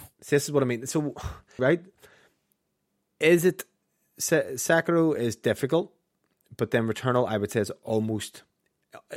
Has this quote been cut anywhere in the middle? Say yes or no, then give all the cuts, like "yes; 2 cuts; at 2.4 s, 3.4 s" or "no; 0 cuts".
yes; 1 cut; at 1.6 s